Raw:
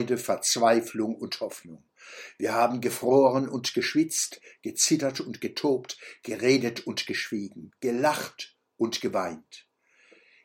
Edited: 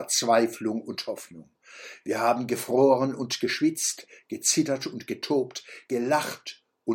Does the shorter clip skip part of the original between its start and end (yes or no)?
yes